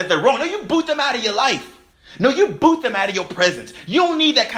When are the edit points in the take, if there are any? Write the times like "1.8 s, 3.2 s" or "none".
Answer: none